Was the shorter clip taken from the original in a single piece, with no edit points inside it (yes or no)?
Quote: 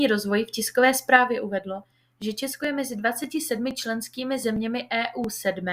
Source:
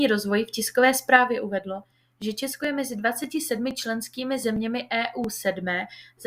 yes